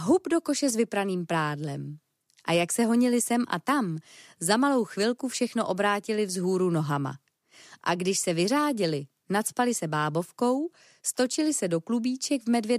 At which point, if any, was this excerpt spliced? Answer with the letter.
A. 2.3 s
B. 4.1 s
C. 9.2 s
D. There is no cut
D